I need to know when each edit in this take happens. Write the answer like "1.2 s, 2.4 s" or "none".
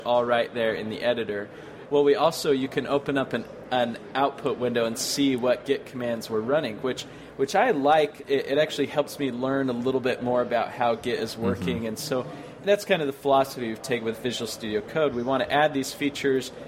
1.9 s